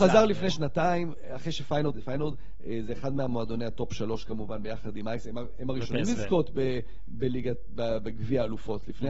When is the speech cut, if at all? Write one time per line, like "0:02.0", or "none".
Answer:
0:01.9

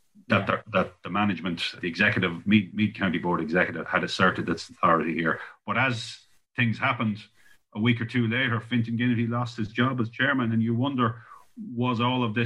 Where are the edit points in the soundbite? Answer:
0:01.8
0:03.8

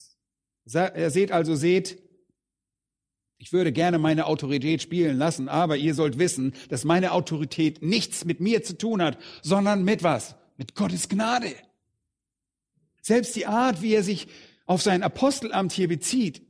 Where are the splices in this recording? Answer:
none

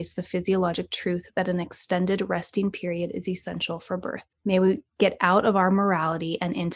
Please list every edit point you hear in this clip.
0:04.3

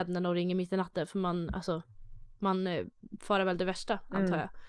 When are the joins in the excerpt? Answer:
none

